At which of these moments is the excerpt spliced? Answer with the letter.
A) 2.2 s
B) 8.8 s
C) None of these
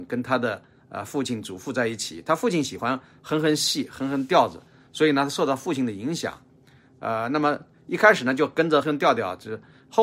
B